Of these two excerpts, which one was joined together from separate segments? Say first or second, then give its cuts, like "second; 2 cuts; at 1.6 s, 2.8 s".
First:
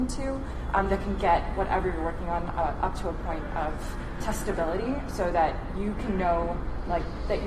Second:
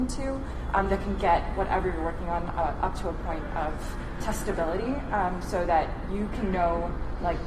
first; 1 cut; at 5.1 s